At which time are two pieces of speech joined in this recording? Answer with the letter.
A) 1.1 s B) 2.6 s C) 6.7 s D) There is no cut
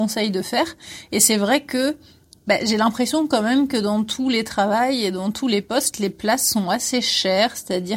D